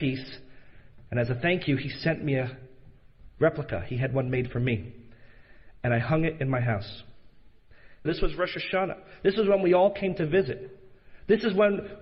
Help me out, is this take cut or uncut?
cut